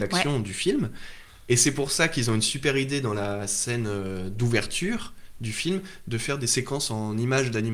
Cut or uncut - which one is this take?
uncut